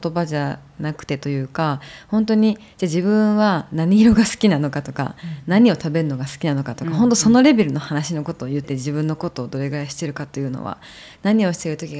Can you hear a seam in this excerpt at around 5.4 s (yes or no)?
no